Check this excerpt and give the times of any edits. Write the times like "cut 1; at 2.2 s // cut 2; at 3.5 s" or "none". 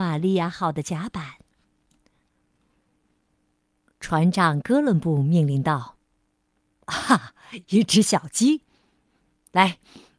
none